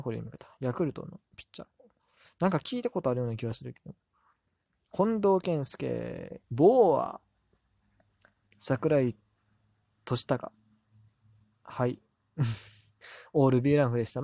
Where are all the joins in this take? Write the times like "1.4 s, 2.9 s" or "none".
6.4 s